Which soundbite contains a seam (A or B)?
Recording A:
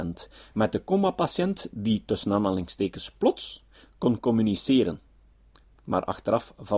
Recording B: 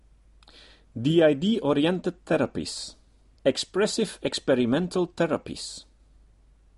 B